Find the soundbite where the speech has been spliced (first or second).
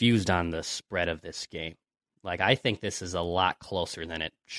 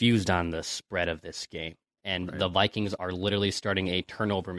second